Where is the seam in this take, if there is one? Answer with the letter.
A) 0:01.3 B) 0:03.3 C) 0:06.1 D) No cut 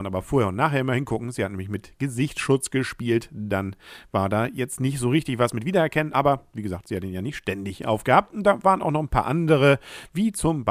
D